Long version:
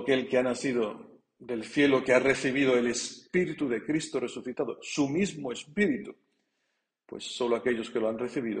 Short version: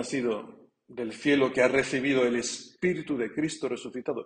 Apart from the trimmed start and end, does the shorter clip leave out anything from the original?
no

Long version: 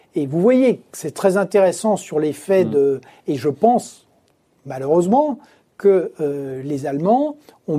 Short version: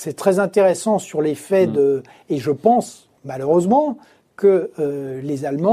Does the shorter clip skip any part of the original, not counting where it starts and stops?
yes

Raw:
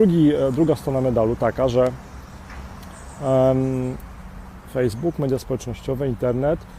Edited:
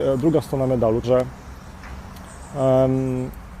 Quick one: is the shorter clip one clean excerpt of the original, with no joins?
no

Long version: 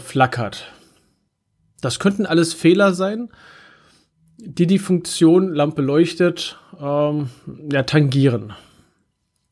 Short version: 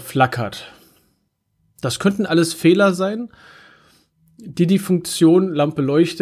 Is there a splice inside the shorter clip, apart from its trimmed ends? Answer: no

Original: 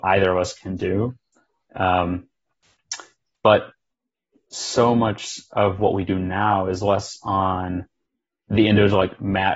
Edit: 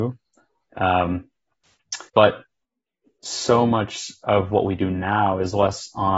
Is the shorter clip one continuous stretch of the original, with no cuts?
no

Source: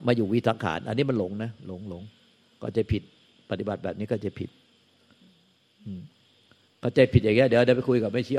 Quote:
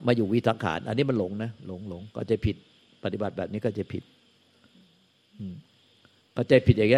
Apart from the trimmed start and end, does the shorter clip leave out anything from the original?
yes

